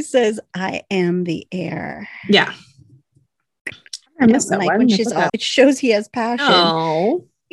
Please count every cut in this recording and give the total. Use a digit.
1